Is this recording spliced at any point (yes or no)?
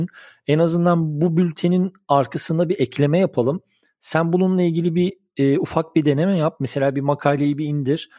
no